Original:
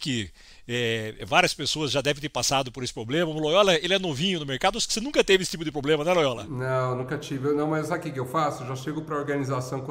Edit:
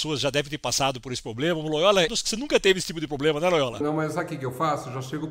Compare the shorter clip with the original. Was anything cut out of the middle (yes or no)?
yes